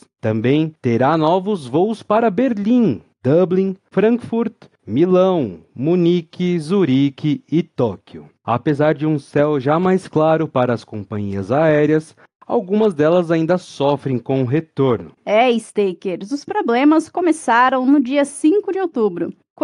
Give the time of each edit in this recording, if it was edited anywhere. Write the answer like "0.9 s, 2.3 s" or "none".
15.2 s